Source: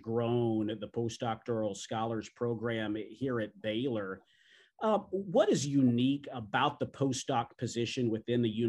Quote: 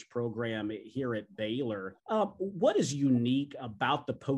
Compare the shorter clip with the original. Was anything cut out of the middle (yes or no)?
yes